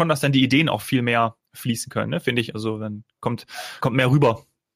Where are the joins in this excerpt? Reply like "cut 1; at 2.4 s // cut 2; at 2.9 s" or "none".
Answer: cut 1; at 3.8 s